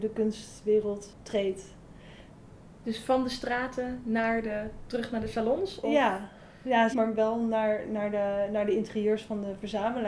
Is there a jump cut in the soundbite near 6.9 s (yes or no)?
yes